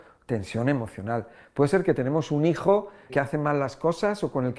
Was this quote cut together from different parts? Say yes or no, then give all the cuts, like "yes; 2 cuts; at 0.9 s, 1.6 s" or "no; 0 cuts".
yes; 1 cut; at 3.1 s